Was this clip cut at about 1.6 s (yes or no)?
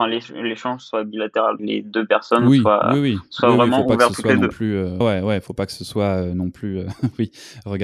yes